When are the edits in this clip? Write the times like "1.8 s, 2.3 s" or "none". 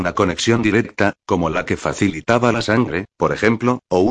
none